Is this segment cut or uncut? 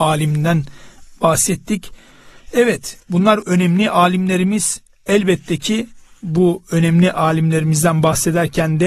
cut